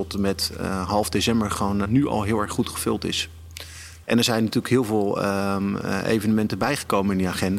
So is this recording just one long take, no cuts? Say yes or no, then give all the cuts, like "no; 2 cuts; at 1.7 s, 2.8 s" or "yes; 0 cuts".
no; 2 cuts; at 1.8 s, 4.0 s